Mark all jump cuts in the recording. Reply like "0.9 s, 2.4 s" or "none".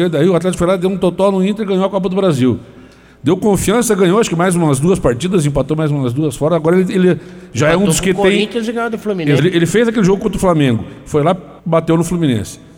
9.4 s, 11.6 s